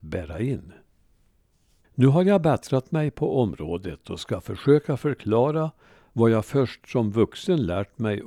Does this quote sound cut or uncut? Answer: cut